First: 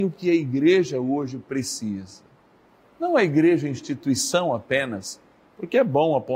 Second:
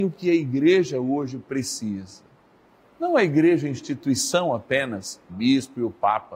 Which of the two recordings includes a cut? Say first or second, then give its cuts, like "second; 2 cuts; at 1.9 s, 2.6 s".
second; 1 cut; at 5.3 s